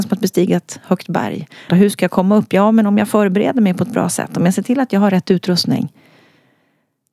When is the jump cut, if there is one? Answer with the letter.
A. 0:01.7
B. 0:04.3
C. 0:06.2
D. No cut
A